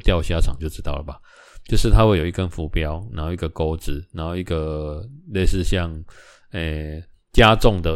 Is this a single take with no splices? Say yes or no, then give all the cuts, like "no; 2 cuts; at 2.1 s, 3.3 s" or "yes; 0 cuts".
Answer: yes; 0 cuts